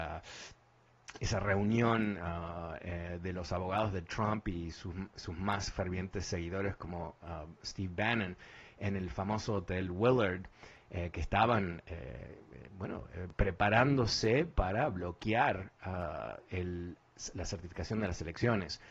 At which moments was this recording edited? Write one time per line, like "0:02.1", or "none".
none